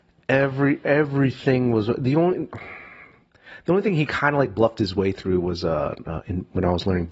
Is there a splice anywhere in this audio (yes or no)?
no